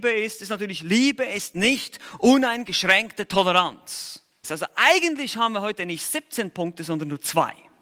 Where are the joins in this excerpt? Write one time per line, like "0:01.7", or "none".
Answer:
0:04.4